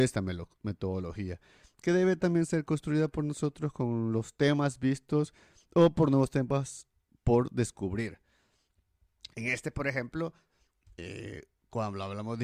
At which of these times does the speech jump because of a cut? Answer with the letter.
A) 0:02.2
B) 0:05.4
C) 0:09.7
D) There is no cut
D